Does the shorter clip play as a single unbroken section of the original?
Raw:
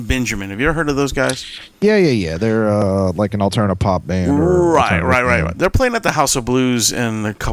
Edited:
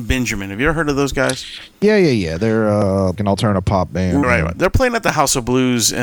no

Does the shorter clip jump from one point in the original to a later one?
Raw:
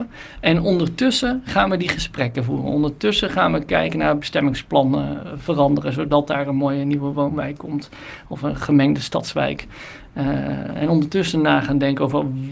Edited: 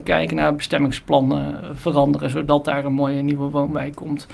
no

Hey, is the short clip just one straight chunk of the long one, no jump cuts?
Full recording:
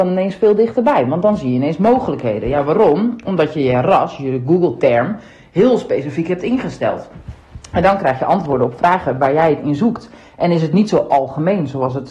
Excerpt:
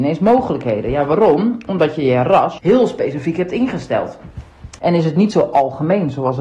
no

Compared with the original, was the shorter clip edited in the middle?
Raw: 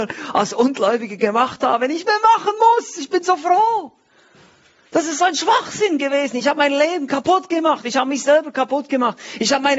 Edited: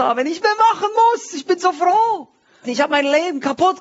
yes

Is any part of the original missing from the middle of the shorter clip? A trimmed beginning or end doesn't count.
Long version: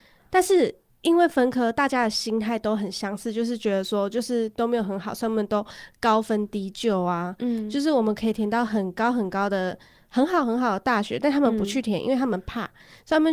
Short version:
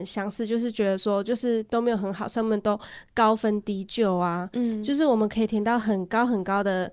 no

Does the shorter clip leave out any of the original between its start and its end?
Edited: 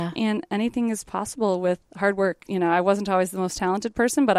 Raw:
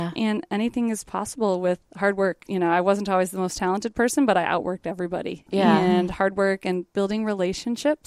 no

